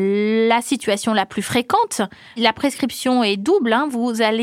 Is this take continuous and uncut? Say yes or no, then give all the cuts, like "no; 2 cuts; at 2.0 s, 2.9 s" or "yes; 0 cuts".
yes; 0 cuts